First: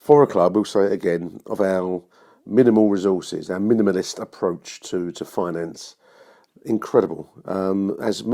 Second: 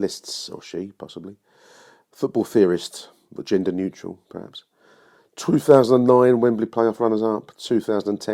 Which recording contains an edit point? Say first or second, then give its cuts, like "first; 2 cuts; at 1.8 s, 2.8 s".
first; 1 cut; at 6.5 s